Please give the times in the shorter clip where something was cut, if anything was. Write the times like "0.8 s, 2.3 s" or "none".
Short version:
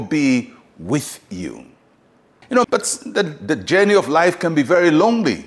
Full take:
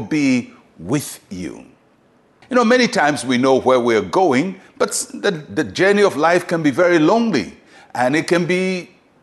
2.6 s